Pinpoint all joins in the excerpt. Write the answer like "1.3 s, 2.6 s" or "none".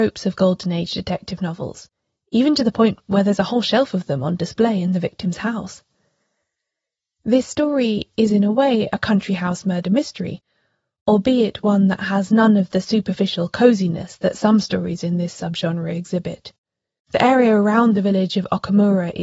none